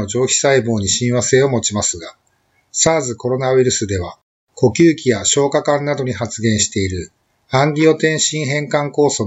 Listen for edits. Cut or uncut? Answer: uncut